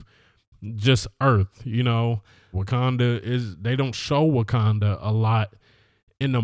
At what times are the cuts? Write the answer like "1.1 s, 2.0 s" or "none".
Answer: 2.5 s